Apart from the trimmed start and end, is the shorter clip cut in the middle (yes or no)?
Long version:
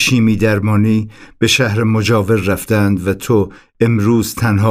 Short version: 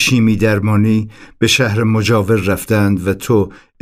no